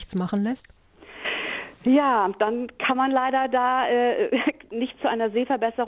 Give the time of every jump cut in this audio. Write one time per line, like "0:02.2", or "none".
none